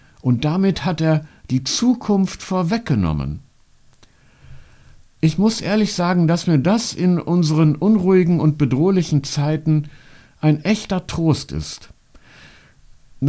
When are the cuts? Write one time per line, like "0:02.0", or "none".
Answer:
none